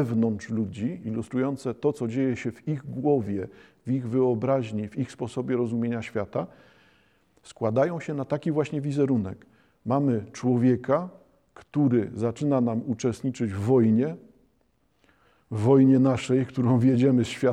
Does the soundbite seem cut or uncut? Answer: uncut